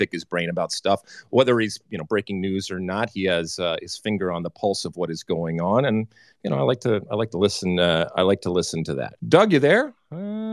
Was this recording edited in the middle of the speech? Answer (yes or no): yes